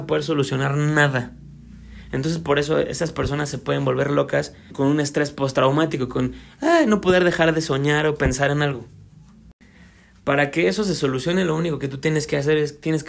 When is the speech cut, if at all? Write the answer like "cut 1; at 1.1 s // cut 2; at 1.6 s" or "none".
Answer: cut 1; at 4.7 s